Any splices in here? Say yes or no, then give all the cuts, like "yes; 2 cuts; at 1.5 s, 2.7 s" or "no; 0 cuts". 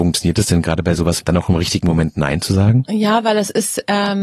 yes; 1 cut; at 1.2 s